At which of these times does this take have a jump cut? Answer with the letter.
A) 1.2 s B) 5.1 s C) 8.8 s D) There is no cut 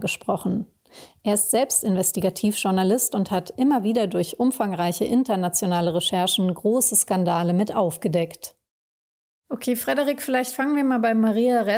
D